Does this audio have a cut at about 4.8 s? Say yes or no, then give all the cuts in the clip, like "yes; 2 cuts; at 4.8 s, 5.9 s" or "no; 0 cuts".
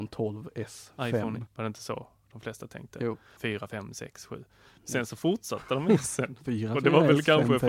no; 2 cuts; at 1.5 s, 3.4 s